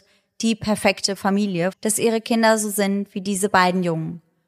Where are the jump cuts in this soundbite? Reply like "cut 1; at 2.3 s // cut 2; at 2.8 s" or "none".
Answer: cut 1; at 1.7 s